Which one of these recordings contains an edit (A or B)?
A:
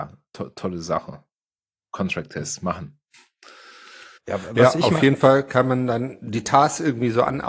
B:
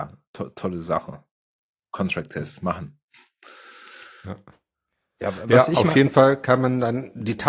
A